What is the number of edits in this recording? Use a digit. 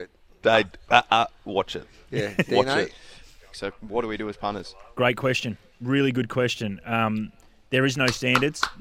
1